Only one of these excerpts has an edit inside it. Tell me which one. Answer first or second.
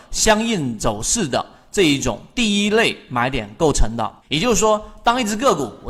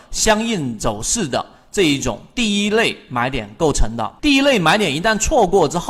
second